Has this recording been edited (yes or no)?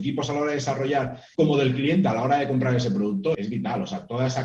yes